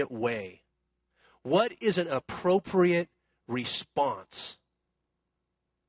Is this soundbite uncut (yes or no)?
yes